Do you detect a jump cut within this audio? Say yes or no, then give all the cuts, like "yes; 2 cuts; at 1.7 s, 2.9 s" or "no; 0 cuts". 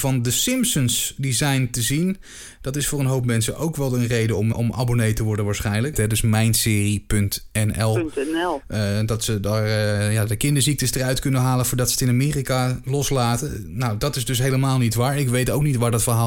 yes; 3 cuts; at 4.5 s, 5.9 s, 8.6 s